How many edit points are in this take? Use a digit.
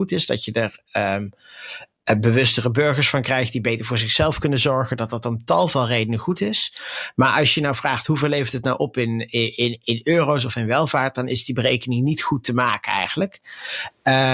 0